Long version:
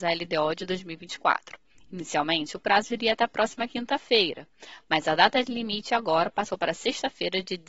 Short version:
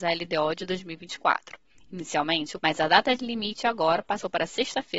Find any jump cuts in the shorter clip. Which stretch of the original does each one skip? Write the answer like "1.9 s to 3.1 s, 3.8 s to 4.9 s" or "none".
2.6 s to 4.9 s